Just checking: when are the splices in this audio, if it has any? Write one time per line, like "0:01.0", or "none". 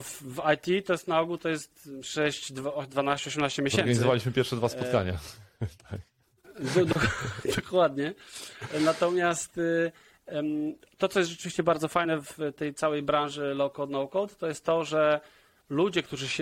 none